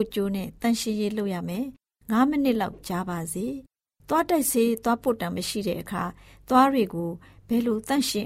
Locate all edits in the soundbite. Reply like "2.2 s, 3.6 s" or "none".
none